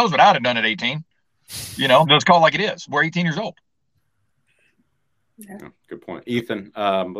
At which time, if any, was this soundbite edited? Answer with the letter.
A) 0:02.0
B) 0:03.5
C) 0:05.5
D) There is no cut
A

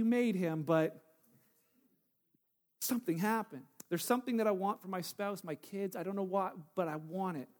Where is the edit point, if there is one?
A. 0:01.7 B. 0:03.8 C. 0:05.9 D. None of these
B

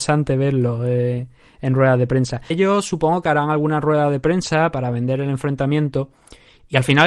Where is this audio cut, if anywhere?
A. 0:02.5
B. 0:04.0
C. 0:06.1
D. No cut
A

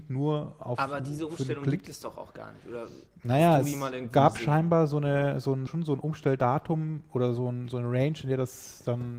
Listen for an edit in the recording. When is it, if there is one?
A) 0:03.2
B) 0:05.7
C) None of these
B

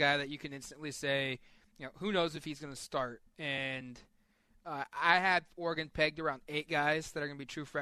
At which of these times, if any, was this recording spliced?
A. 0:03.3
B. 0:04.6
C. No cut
A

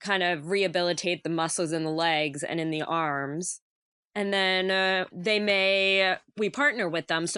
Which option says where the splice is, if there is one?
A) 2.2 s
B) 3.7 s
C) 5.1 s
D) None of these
C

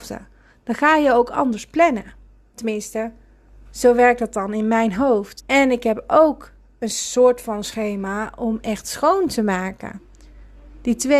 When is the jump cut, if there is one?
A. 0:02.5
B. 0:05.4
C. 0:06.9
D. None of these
B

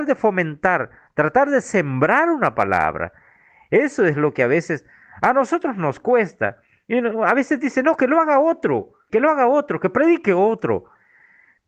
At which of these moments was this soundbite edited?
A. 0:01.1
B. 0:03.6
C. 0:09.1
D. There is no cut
C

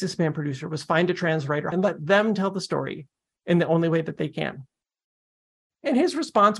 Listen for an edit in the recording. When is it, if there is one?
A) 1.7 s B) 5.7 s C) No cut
A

